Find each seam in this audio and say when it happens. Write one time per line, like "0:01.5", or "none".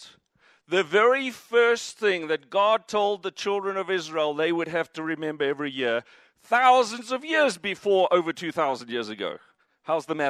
none